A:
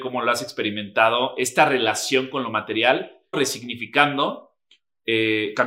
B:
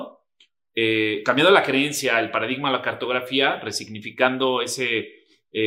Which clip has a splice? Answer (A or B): A